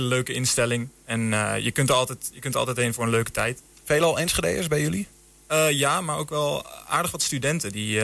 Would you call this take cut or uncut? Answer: uncut